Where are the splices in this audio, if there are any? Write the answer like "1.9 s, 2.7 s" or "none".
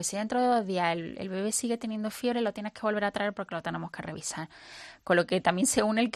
5.0 s